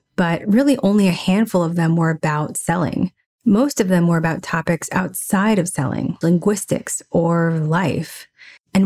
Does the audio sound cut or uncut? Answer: cut